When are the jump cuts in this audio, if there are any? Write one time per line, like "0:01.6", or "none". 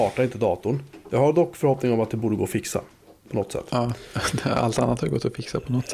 none